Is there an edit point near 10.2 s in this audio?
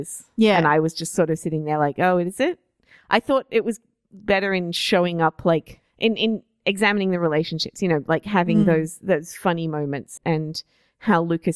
yes; 1 cut; at 10.2 s

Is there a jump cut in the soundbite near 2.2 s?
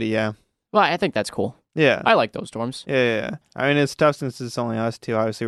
no; 1 cut; at 3.4 s

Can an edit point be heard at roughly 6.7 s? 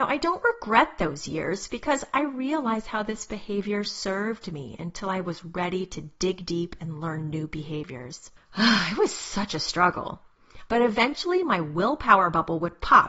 no; 2 cuts; at 8.4 s, 10.7 s

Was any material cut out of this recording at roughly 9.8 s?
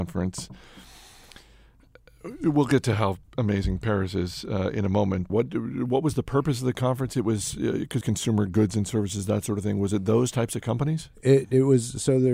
no; 2 cuts; at 5.3 s, 8.0 s

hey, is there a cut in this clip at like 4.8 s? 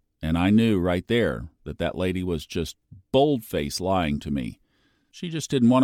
no; 0 cuts

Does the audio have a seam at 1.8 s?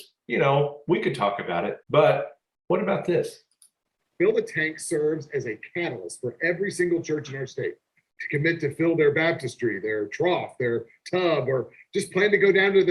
yes; 1 cut; at 1.8 s

